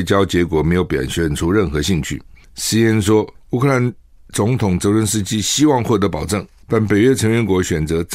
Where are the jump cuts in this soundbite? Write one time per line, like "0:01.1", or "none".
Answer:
0:03.4
0:06.6